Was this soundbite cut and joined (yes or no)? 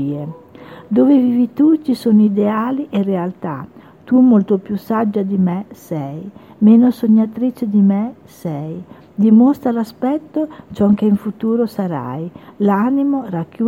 no